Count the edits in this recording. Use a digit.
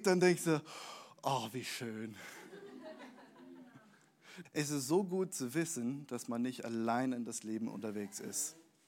1